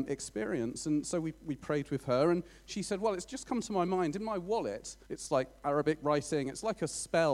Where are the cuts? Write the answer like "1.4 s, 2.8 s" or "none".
5.1 s